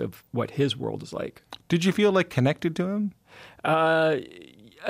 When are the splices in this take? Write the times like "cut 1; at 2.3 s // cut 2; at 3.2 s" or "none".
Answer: none